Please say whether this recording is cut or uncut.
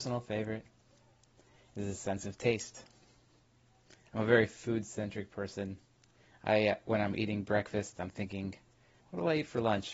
uncut